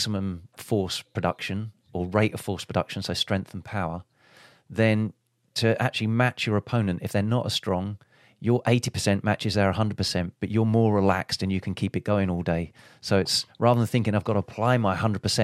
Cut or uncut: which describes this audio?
uncut